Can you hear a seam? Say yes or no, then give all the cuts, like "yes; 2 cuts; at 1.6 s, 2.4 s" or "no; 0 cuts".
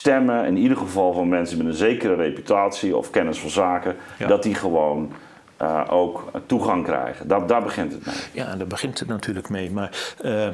no; 0 cuts